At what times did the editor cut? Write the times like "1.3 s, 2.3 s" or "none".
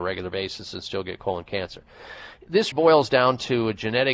2.7 s